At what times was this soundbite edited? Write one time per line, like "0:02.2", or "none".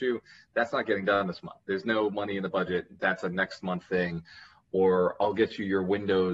none